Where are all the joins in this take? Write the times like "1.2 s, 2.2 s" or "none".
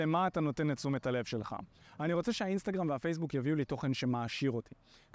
1.8 s